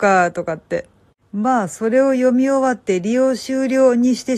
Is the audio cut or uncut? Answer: cut